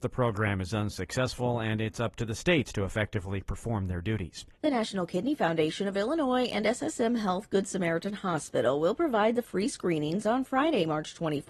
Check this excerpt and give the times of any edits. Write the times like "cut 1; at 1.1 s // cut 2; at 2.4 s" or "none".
cut 1; at 4.5 s